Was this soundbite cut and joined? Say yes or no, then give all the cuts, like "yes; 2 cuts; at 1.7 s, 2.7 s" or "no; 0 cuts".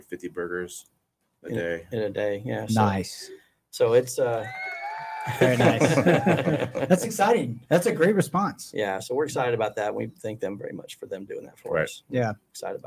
no; 0 cuts